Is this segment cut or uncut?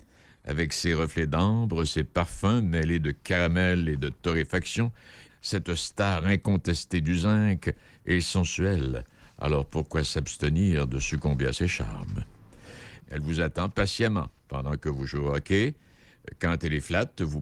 cut